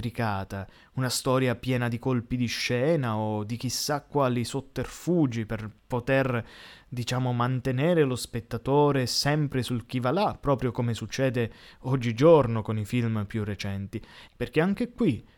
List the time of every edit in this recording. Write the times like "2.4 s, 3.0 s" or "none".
14.3 s